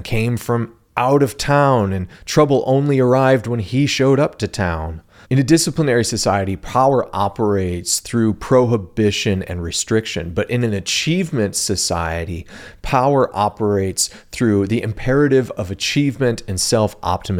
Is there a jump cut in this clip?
yes; 1 cut; at 5.2 s

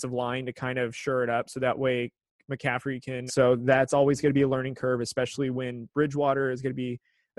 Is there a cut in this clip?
yes; 1 cut; at 3.3 s

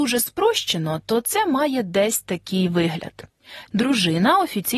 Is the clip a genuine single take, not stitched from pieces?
no; 1 cut; at 3.7 s

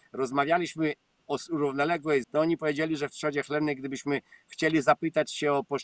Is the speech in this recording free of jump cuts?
no; 1 cut; at 2.2 s

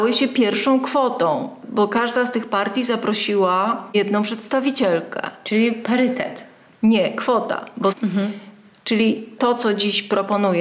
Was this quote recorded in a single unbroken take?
no; 1 cut; at 7.9 s

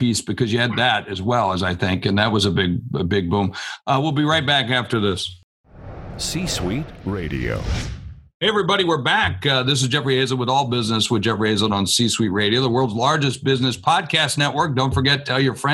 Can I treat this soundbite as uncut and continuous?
yes; 0 cuts

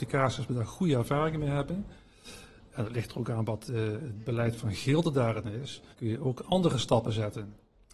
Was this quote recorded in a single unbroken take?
no; 1 cut; at 5.9 s

